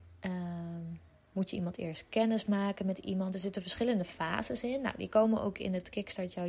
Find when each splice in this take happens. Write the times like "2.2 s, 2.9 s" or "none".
none